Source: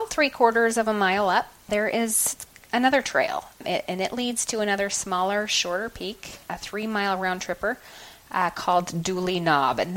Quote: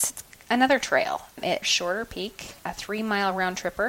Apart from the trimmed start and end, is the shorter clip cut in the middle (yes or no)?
yes